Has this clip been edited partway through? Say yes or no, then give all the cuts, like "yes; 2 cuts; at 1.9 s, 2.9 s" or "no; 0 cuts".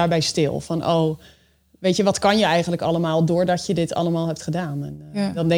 no; 0 cuts